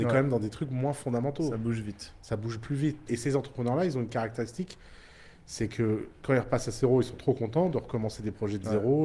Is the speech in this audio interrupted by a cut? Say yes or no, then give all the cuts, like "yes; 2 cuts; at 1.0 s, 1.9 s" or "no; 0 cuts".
yes; 1 cut; at 3.1 s